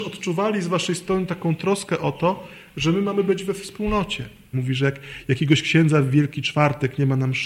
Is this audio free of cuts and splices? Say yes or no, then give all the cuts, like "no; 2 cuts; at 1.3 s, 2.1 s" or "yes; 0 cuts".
no; 1 cut; at 4.5 s